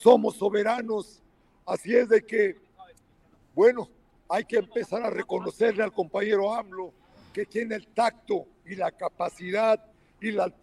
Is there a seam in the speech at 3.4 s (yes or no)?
no